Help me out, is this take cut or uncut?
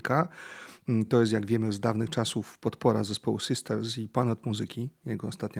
uncut